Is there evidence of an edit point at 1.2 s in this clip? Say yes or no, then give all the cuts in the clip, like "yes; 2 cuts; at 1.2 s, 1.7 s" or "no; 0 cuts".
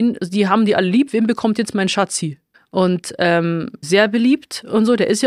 no; 2 cuts; at 2.5 s, 3.8 s